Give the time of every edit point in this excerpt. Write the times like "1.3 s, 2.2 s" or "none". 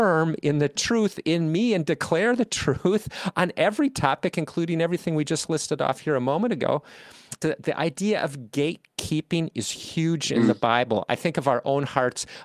7.4 s